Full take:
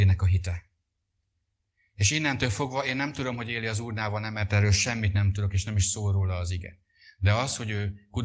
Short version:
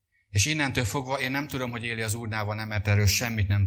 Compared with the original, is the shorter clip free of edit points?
yes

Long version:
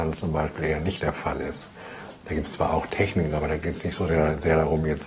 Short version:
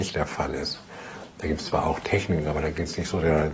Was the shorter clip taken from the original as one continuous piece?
yes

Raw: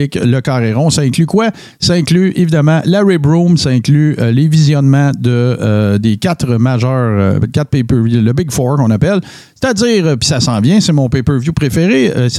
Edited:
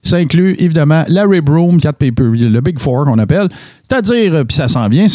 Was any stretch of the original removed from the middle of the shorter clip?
yes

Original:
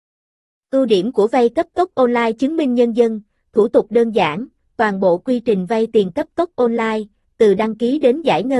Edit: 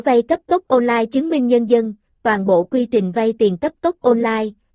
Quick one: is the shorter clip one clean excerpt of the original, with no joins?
no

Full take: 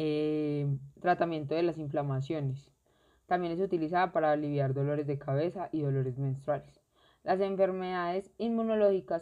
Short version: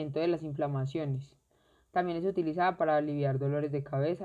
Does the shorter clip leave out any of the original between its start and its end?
no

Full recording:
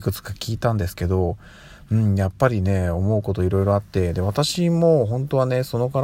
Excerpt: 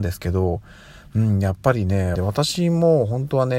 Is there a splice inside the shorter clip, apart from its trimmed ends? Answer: yes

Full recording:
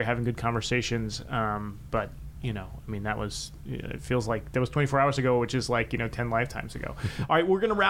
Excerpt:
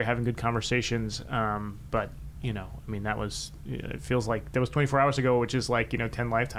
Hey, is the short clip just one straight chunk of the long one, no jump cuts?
yes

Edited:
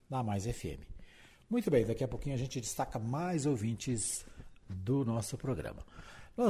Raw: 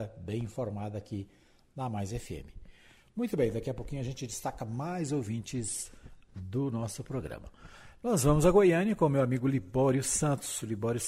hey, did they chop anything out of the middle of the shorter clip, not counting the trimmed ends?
no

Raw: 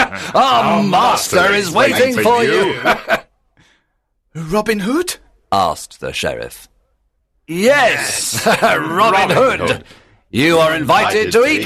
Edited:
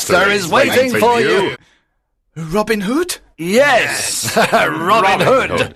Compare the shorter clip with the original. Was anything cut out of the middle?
yes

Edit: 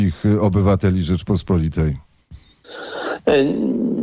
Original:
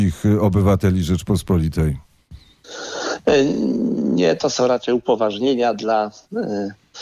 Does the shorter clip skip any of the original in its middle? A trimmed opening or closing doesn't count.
no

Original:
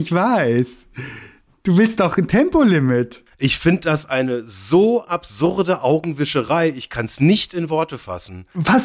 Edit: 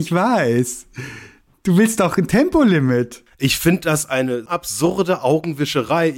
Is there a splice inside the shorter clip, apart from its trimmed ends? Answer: yes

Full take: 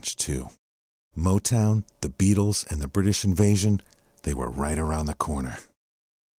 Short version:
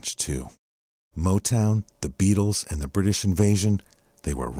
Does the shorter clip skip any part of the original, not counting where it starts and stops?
no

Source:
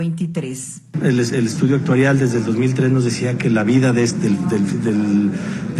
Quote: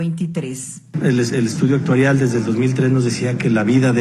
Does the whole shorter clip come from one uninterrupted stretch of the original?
yes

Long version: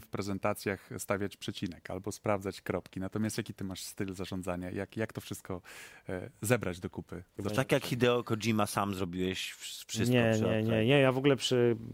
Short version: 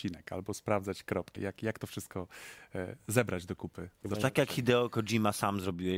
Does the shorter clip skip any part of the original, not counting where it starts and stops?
yes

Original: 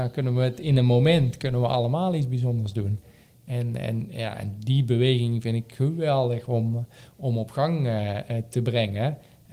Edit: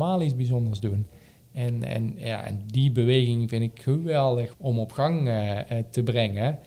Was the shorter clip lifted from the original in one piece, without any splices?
no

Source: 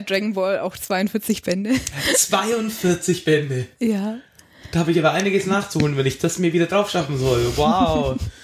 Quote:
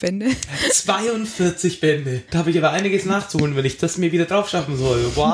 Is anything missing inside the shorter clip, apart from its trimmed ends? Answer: yes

